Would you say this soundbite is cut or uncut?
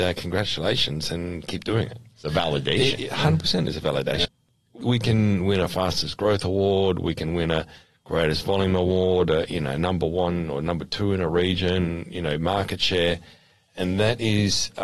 uncut